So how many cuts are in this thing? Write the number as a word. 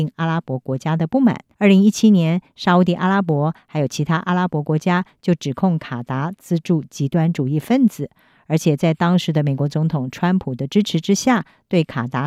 one